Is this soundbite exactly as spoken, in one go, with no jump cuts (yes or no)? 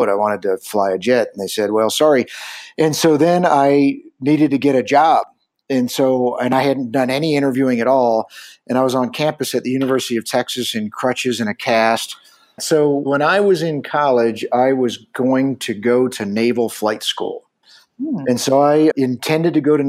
no